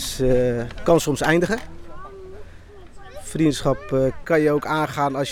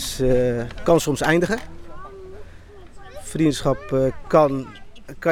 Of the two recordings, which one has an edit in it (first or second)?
first